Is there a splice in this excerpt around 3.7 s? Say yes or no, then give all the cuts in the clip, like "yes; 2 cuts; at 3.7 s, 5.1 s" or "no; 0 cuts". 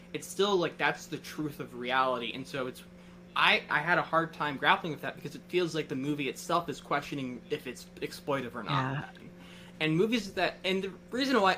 yes; 2 cuts; at 3.7 s, 9.2 s